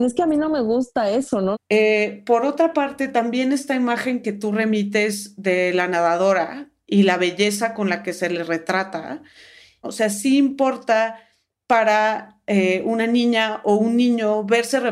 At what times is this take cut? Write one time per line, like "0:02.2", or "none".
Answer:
0:01.5
0:09.8